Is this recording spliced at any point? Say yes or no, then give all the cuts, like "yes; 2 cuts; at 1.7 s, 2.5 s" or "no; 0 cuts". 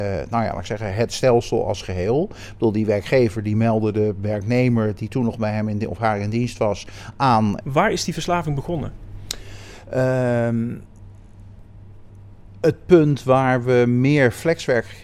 yes; 1 cut; at 7.6 s